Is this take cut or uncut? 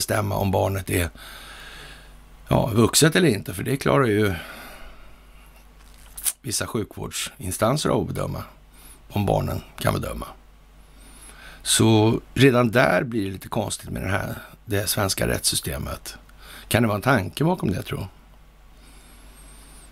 uncut